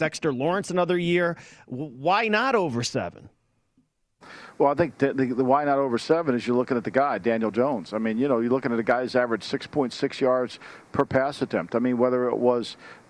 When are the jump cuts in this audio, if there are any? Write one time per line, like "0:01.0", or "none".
none